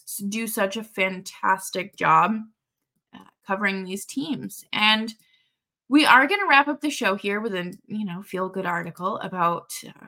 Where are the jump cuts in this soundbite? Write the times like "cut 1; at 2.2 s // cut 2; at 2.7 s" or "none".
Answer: none